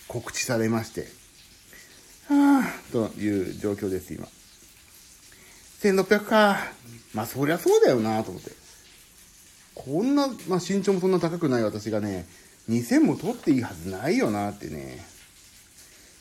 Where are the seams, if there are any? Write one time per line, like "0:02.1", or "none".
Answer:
none